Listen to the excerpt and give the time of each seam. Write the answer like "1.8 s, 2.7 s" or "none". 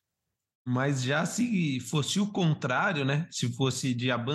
none